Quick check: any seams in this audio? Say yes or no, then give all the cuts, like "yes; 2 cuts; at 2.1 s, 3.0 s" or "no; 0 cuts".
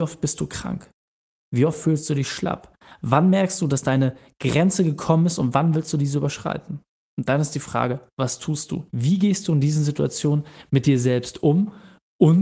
yes; 1 cut; at 8.9 s